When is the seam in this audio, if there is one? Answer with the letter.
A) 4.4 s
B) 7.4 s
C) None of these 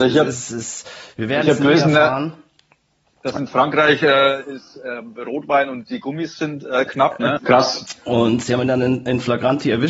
B